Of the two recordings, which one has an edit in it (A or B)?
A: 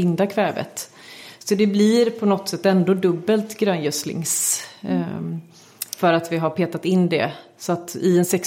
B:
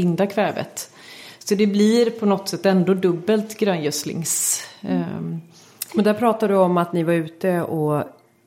B